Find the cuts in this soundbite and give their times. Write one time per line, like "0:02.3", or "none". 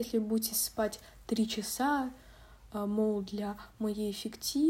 none